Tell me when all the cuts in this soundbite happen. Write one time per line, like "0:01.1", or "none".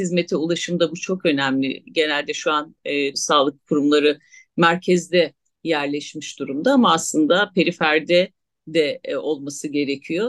0:03.1